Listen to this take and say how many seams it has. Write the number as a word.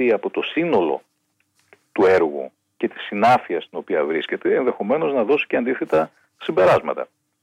zero